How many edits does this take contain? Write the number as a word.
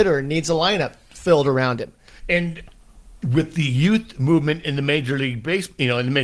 one